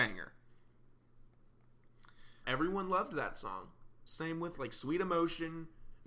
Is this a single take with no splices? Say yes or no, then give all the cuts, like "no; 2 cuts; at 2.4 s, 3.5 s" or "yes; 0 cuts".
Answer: no; 1 cut; at 2.4 s